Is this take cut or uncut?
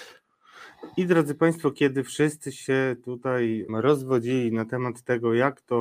cut